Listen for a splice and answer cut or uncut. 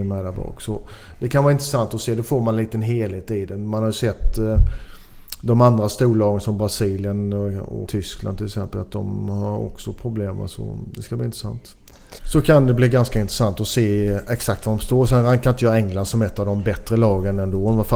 cut